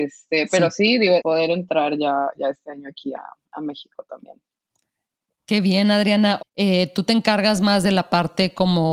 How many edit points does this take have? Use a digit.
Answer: 2